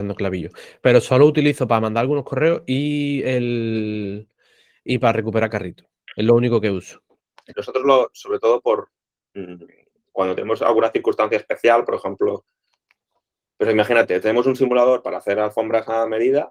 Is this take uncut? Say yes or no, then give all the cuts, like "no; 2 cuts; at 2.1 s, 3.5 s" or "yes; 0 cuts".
no; 1 cut; at 7.5 s